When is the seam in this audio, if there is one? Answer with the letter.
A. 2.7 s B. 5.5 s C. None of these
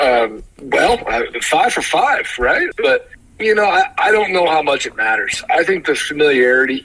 A